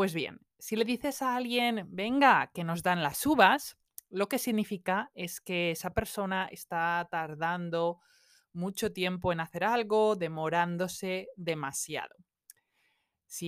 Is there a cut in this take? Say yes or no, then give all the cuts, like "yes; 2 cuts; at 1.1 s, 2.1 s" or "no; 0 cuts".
no; 0 cuts